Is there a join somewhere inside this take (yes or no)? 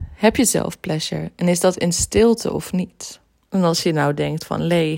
yes